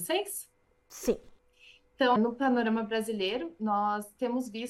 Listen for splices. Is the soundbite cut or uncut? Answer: cut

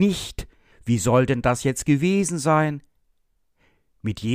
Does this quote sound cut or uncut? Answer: uncut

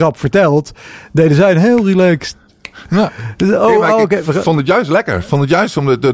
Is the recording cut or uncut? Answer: uncut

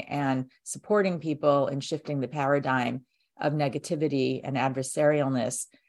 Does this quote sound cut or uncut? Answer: uncut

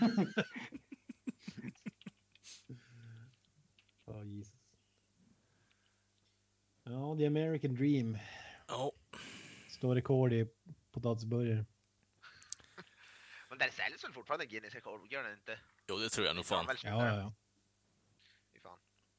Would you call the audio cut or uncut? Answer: uncut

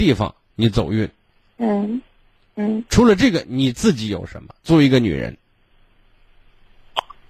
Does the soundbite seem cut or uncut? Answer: uncut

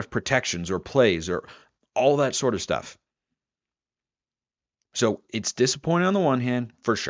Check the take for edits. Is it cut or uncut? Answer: uncut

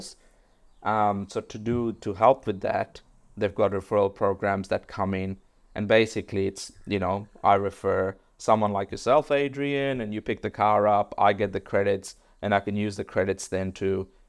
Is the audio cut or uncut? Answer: uncut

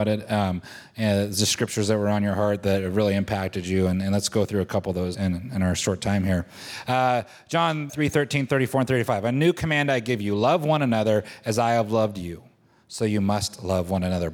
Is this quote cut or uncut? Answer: cut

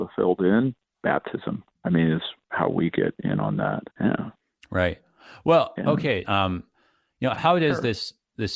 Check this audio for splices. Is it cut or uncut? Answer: cut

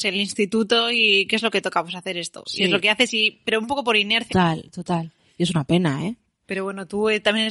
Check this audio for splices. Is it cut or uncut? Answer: cut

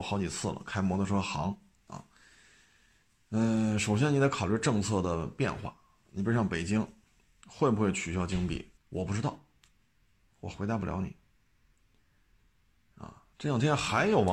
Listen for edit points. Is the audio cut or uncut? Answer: cut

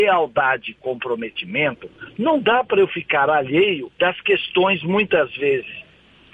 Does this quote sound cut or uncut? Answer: cut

